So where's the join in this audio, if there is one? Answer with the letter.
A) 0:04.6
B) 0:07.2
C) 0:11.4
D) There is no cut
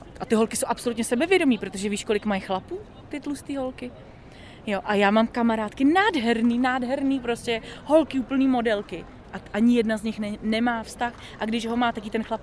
D